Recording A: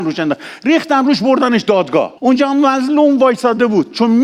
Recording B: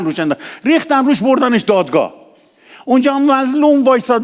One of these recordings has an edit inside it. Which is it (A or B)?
A